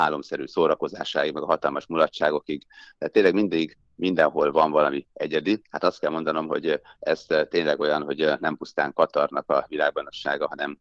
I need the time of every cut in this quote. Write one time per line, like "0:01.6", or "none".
none